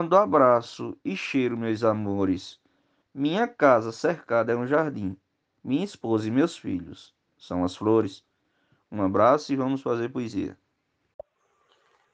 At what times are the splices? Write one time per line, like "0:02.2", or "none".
0:03.0